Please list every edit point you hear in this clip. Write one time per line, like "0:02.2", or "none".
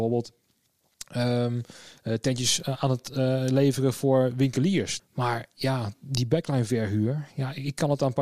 0:05.0